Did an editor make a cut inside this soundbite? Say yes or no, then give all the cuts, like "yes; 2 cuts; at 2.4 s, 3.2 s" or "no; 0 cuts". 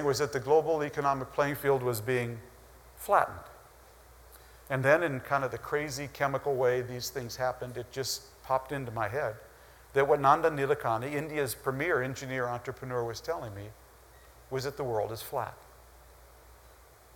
no; 0 cuts